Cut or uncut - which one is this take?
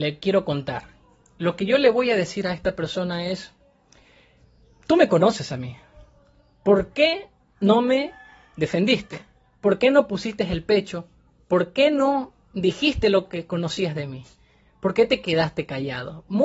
uncut